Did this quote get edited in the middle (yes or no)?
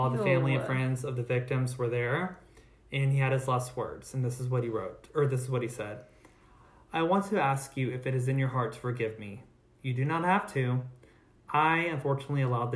no